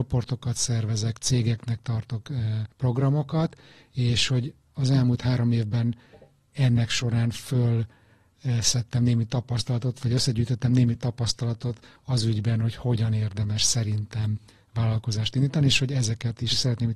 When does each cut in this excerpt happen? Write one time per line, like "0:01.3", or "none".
0:02.7